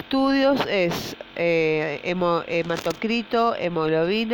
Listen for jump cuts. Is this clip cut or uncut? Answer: uncut